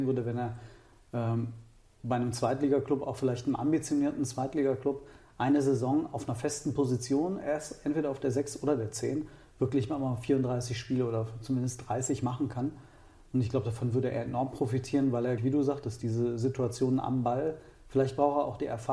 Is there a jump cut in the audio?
yes; 1 cut; at 15.4 s

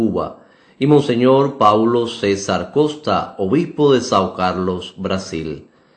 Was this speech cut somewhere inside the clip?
no; 0 cuts

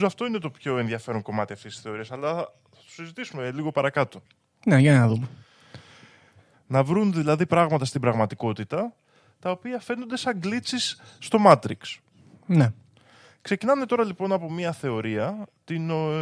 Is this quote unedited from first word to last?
no; 1 cut; at 6.5 s

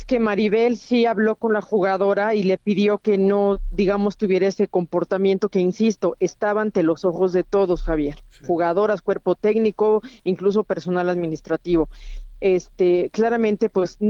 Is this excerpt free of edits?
yes; 0 cuts

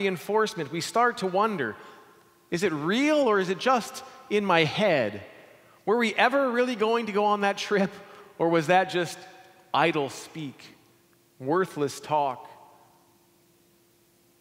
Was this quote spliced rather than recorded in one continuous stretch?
no; 0 cuts

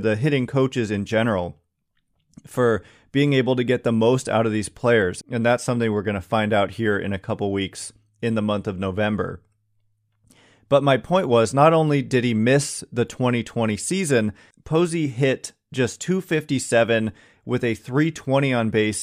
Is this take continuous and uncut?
no; 2 cuts; at 5.2 s, 14.5 s

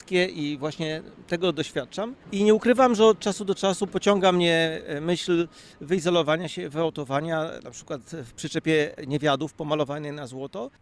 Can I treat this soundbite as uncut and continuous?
yes; 0 cuts

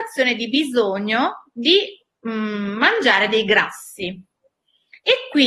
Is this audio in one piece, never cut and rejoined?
yes; 0 cuts

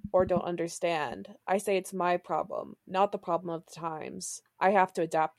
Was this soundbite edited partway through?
no; 0 cuts

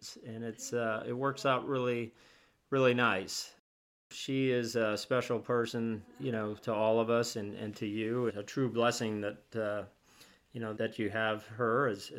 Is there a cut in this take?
yes; 2 cuts; at 8.3 s, 10.8 s

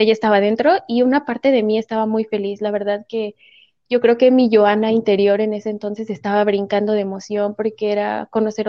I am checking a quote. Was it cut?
no; 0 cuts

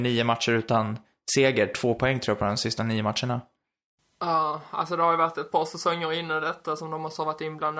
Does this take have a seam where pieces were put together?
no; 0 cuts

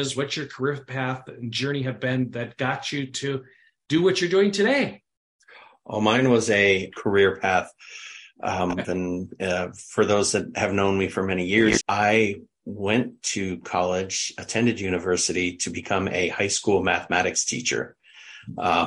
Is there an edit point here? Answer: yes; 3 cuts; at 6.9 s, 8.8 s, 11.8 s

